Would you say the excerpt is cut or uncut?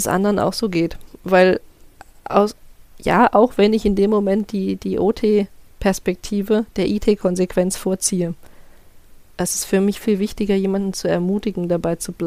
cut